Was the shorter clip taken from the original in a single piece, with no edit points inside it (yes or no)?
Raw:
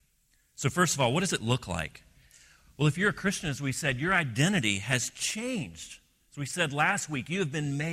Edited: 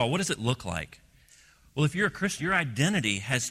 no